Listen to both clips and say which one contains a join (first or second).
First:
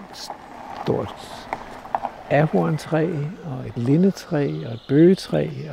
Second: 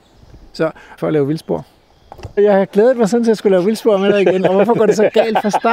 second